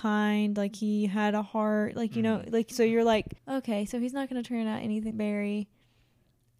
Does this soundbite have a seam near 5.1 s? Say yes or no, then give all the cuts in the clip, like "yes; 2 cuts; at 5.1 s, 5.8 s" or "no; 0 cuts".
yes; 2 cuts; at 3.4 s, 5.1 s